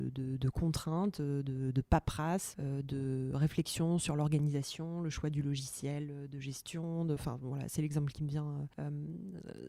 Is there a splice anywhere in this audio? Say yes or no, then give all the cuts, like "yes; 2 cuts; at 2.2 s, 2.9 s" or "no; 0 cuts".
no; 0 cuts